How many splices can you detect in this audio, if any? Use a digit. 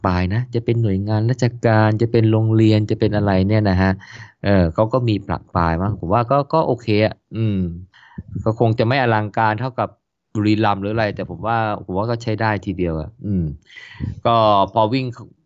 0